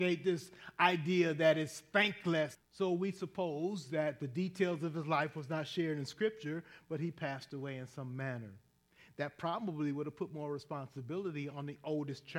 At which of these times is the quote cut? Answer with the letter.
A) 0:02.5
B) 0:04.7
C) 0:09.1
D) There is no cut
A